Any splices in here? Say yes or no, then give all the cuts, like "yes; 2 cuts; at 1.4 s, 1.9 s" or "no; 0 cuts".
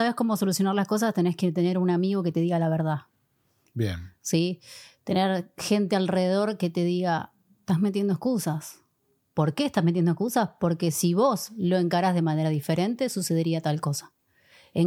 no; 0 cuts